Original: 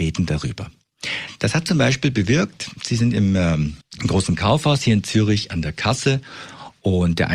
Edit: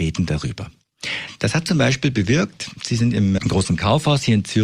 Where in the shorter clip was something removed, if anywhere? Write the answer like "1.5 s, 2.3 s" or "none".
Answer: 3.4 s